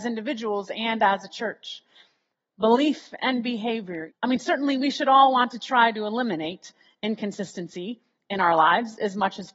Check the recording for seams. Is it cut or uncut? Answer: cut